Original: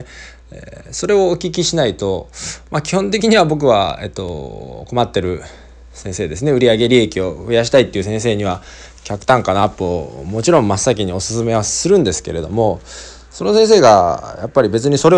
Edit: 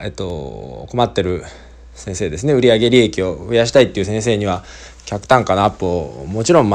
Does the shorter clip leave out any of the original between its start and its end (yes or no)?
no